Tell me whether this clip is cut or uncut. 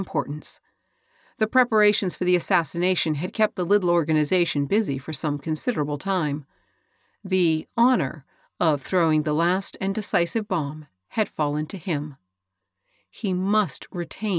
uncut